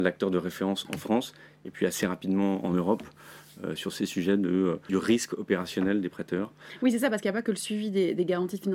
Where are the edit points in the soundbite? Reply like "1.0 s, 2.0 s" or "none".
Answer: 4.9 s